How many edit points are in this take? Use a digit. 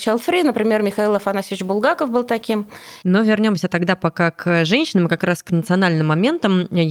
1